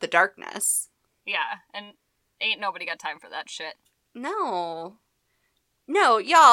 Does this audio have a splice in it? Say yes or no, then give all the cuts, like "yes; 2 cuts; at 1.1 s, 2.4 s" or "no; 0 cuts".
no; 0 cuts